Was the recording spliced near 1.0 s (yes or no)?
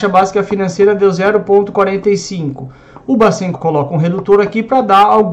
no